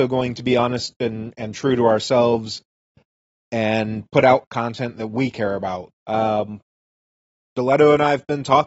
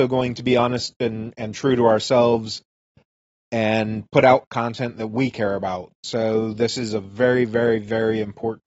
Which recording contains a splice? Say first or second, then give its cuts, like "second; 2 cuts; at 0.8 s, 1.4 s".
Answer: first; 1 cut; at 5.9 s